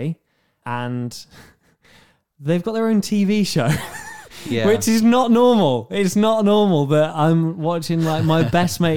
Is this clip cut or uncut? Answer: uncut